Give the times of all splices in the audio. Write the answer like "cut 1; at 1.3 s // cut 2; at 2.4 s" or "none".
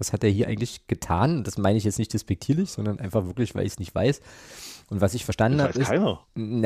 none